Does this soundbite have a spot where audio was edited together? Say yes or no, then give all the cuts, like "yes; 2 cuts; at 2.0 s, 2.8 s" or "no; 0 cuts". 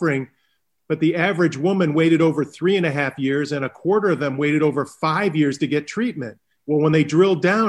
yes; 1 cut; at 6.6 s